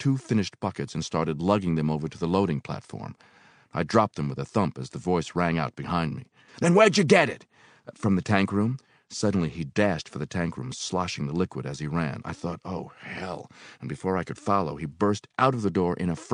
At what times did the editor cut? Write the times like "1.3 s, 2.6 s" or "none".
6.5 s